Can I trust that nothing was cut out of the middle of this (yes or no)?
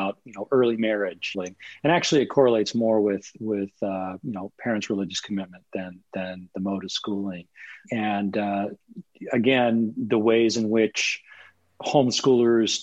no